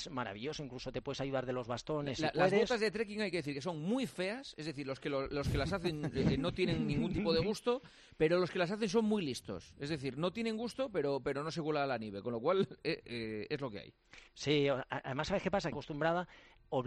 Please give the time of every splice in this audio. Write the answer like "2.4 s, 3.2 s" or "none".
14.3 s, 15.7 s